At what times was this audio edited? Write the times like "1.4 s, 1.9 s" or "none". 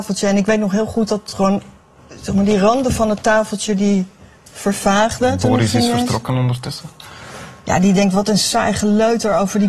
none